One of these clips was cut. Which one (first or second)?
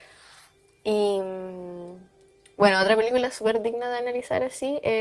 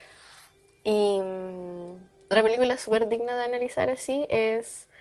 second